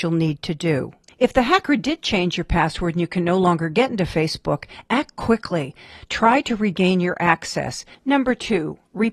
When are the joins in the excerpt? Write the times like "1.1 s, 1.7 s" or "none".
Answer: none